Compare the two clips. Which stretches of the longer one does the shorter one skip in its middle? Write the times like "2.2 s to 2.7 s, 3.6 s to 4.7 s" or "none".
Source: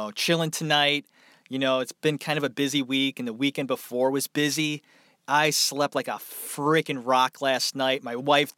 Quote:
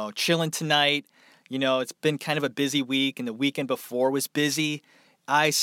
none

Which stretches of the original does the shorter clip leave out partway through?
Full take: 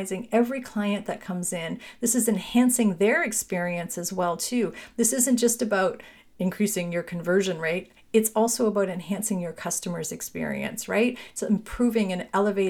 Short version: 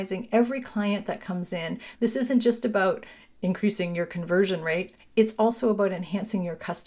1.9 s to 4.9 s

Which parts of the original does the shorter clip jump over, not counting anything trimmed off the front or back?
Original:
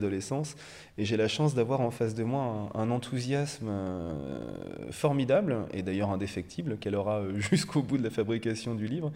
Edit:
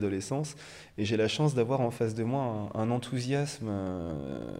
none

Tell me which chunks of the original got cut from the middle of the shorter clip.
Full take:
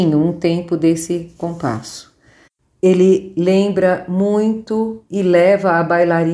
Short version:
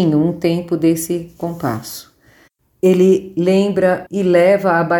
4.1 s to 5.1 s

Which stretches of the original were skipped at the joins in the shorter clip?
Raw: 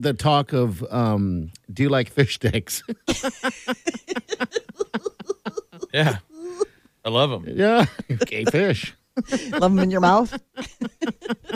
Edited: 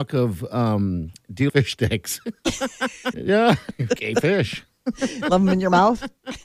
1.9 s to 2.1 s, 3.8 s to 7.4 s

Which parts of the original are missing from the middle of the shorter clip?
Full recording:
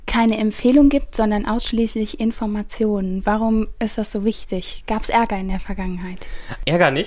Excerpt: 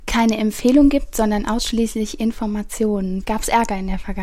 3.2 s to 4.8 s

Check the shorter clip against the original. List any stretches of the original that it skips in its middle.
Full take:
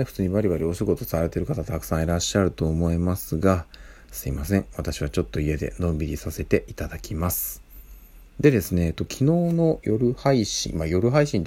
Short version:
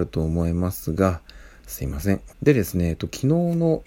4.7 s to 8.3 s

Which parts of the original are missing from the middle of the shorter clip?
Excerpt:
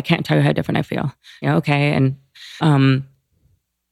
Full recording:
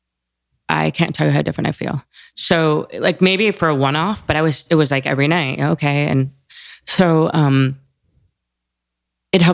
2.3 s to 5.6 s, 6.7 s to 7.3 s

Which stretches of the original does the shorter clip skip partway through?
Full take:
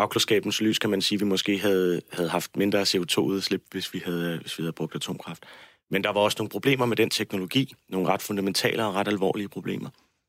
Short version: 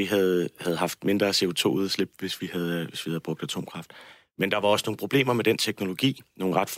none

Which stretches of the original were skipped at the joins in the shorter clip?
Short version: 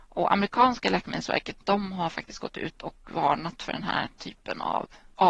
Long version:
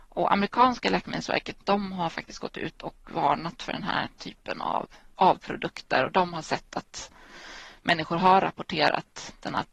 none

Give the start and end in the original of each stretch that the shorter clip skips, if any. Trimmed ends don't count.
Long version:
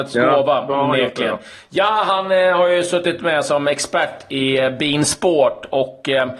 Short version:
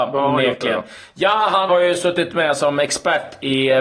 2.2 s to 2.6 s

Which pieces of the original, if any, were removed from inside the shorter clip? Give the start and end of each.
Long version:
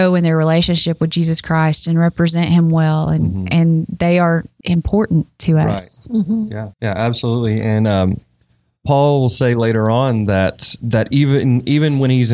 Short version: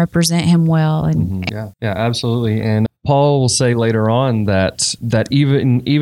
3.5 s to 6.5 s, 7.9 s to 8.7 s

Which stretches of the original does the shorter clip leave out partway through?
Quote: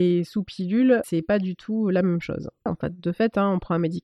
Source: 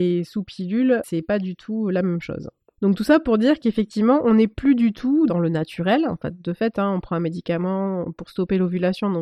2.7 s to 6.1 s

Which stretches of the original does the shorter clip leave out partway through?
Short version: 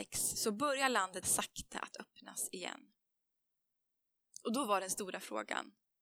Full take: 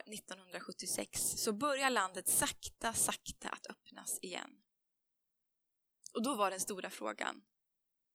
2.2 s to 2.9 s

